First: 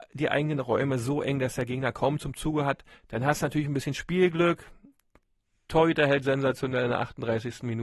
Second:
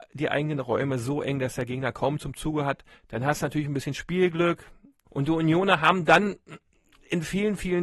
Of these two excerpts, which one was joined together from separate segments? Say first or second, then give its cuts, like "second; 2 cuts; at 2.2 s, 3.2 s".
second; 1 cut; at 5.1 s